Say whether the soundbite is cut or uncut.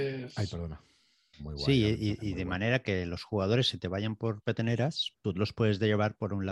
cut